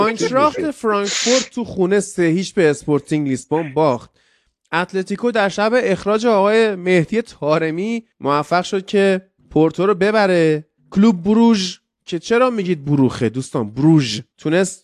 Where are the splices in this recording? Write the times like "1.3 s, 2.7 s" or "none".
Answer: 8.1 s, 9.4 s, 10.8 s

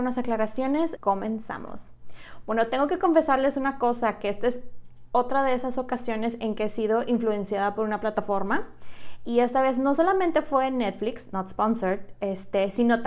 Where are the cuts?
1.0 s

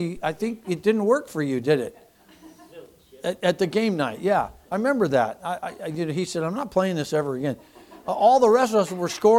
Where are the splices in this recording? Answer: none

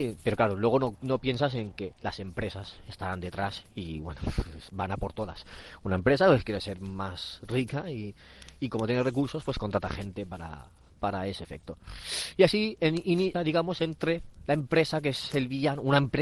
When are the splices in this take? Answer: 13.3 s

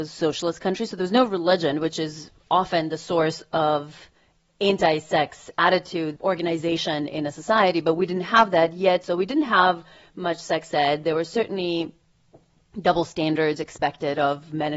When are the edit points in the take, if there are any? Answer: 9.0 s

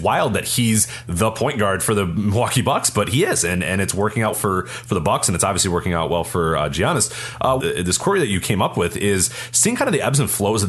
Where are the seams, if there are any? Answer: 4.3 s, 7.6 s

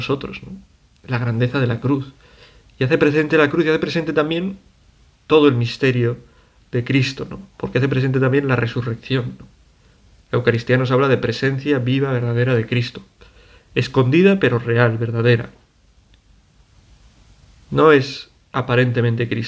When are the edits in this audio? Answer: none

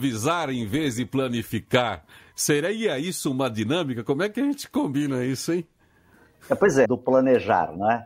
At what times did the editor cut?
6.8 s

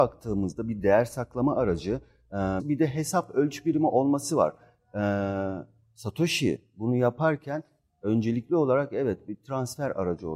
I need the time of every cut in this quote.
2.6 s

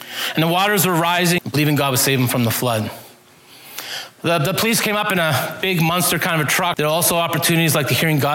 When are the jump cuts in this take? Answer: 1.4 s, 6.7 s

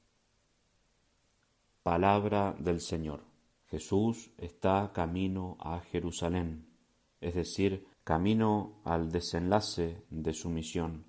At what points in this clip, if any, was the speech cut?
3.6 s, 7.9 s

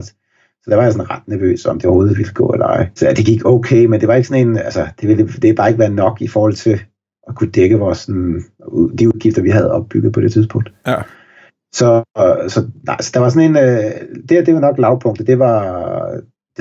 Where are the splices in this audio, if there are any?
none

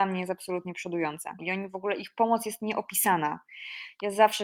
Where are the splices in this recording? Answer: 1.4 s

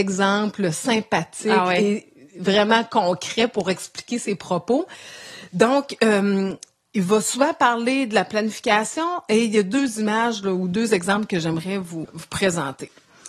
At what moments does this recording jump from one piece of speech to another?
12.0 s

